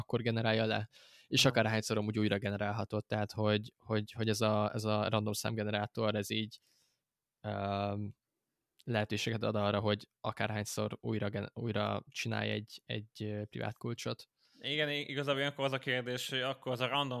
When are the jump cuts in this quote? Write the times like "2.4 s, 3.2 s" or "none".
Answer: none